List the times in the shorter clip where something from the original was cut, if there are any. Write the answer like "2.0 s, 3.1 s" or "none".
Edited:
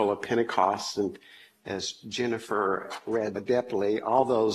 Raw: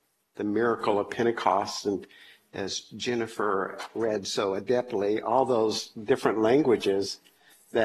3.4 s